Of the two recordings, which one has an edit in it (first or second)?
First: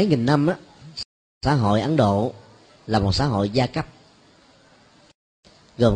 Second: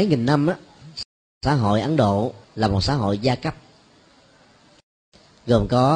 second